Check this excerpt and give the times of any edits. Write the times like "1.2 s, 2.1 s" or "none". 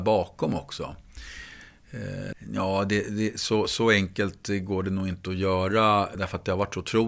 2.3 s

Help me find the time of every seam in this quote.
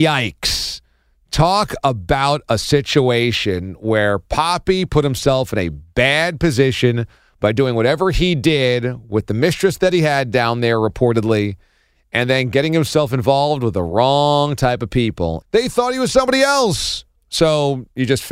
15.4 s, 17.2 s

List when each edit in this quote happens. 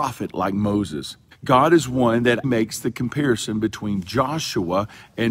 1.3 s, 2.4 s

